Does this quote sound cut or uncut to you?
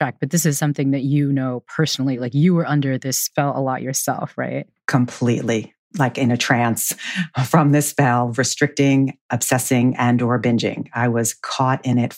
uncut